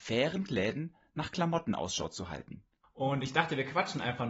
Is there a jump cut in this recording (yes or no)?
yes